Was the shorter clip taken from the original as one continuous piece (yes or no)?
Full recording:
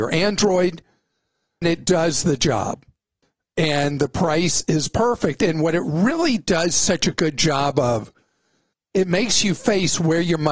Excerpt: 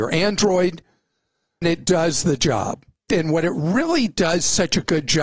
no